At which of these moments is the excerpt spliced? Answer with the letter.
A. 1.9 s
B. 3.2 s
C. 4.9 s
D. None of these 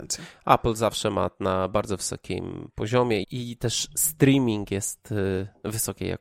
B